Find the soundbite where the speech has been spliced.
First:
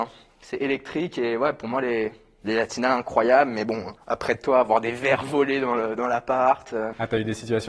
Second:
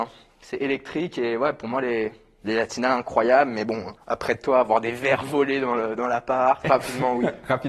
second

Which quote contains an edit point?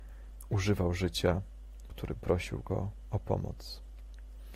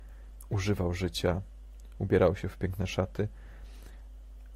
first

